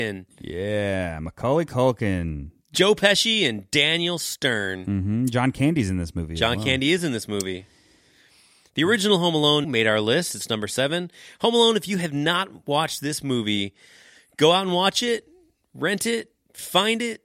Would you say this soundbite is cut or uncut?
cut